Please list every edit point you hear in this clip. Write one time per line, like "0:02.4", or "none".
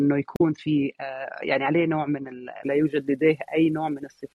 0:02.6